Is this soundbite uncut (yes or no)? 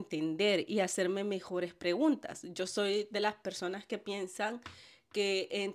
yes